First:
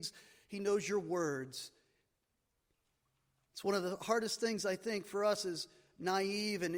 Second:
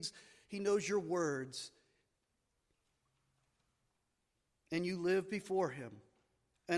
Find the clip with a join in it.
first; 1 cut; at 3.5 s

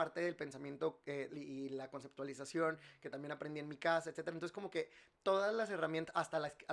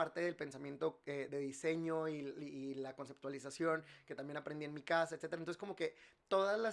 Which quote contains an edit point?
first; 1 cut; at 1.3 s

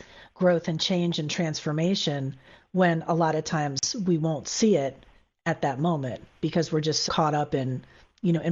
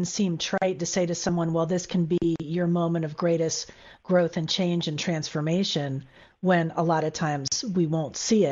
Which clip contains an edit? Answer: first; 1 cut; at 7.1 s

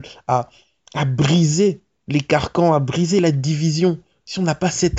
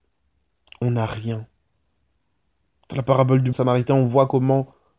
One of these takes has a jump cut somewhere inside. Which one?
second; 1 cut; at 3.5 s

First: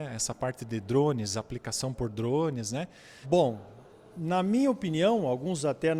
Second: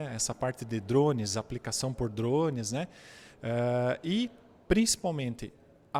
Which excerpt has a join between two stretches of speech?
first; 1 cut; at 3.2 s

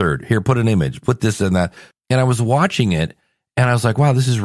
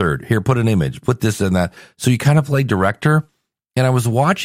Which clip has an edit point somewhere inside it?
first; 1 cut; at 1.9 s

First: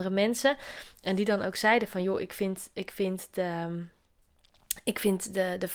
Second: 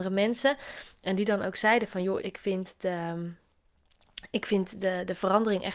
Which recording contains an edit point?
second; 1 cut; at 2.2 s

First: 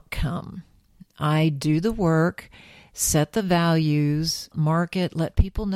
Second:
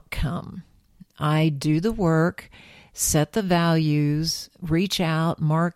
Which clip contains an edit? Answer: first; 1 cut; at 4.5 s

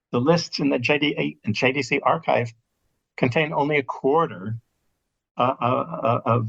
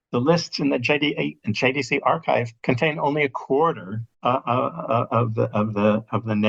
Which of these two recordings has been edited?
second; 2 cuts; at 2.6 s, 4.1 s

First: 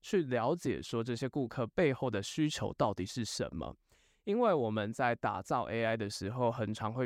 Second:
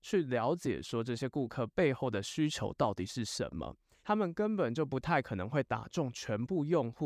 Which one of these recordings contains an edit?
second; 1 cut; at 4.0 s

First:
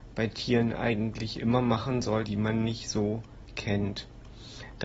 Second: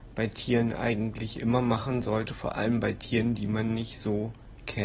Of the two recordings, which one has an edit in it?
first; 1 cut; at 2.3 s

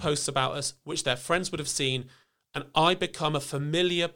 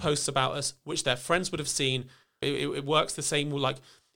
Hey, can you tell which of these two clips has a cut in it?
second; 1 cut; at 2.4 s

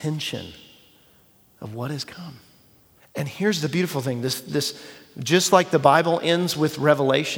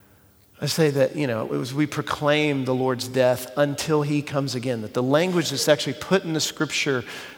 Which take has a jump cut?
first; 1 cut; at 3.0 s

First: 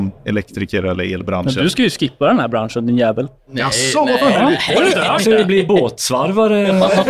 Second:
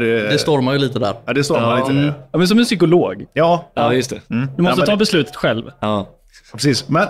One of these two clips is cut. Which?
second; 1 cut; at 2.3 s

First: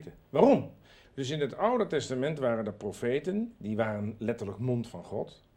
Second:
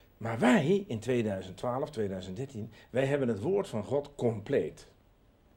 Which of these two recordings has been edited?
first; 1 cut; at 1.0 s

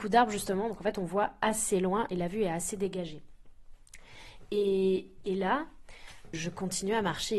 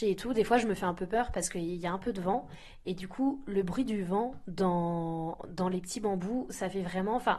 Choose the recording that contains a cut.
first; 1 cut; at 6.3 s

